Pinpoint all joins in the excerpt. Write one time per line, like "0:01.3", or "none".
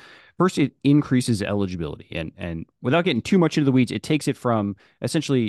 none